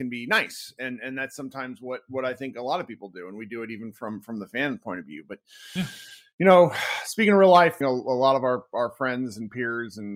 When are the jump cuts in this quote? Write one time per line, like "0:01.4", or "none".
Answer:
0:07.8